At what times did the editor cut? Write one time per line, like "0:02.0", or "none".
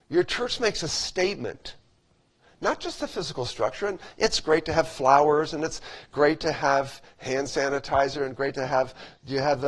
none